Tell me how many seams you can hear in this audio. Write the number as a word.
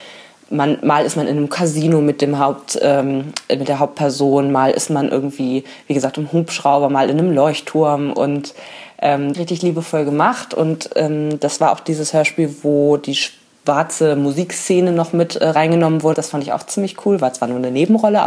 two